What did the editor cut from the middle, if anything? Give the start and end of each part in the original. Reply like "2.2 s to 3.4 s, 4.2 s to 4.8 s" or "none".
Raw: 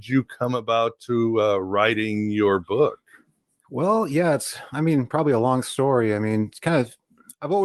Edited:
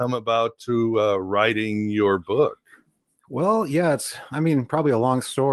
none